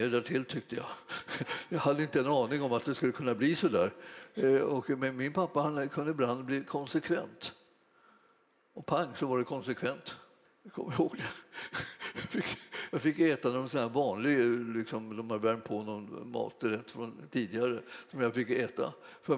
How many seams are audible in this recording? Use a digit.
1